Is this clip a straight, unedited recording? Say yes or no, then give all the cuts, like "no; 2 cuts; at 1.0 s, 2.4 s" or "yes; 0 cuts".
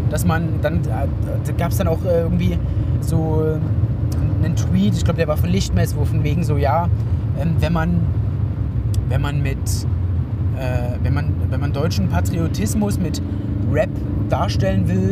no; 1 cut; at 3.0 s